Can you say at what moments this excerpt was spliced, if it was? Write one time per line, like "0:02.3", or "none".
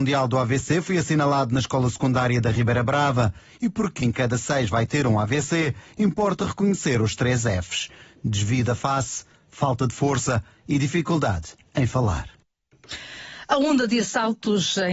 0:04.0